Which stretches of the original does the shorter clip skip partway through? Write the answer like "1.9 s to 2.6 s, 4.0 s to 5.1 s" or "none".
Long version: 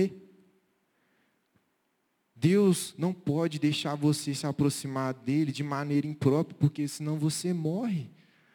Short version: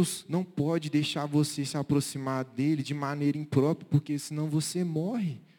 none